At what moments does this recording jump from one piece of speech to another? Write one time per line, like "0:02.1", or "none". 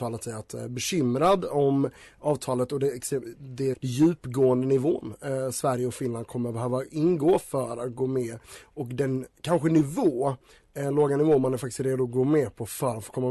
0:03.7